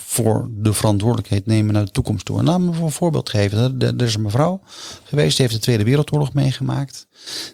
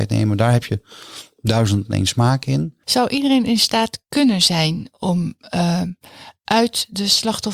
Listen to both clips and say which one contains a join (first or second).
second